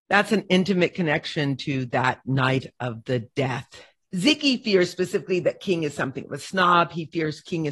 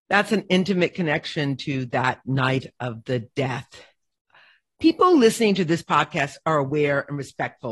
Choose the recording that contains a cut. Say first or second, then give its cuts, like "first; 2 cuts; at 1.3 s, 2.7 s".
first; 1 cut; at 4.0 s